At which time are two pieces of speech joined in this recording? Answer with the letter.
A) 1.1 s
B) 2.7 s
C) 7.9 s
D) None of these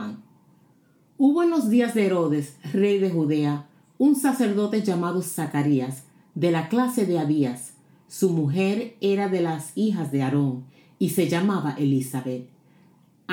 D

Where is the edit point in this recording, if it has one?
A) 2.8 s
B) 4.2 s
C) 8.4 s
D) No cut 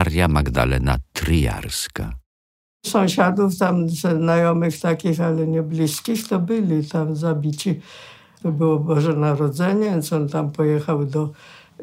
C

